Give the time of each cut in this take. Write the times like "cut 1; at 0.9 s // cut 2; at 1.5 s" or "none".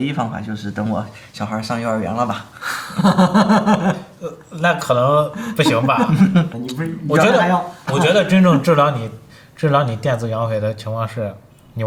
cut 1; at 6.5 s // cut 2; at 7.9 s